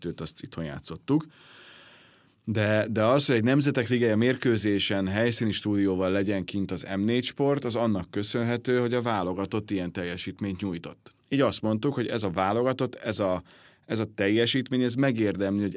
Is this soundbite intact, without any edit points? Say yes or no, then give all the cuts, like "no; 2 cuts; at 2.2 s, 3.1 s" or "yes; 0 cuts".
no; 1 cut; at 11.2 s